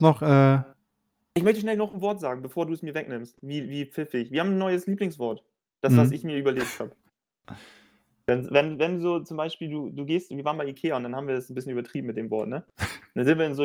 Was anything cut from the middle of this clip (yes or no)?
yes